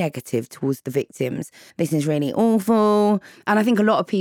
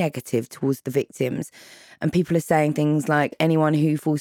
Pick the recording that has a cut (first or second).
first